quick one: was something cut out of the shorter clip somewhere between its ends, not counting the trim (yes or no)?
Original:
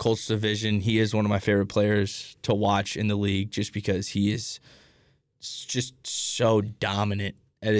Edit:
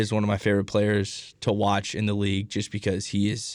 no